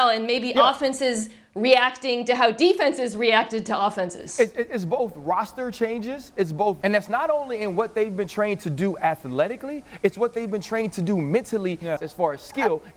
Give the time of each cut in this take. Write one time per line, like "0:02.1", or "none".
0:06.8
0:12.0